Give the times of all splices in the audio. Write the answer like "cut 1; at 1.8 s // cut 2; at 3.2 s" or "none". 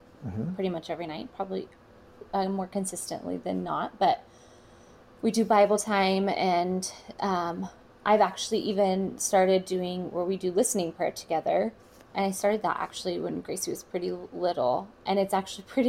none